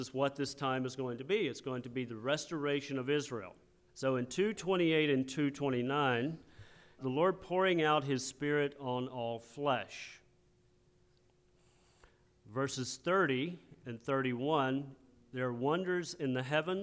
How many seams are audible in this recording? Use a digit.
2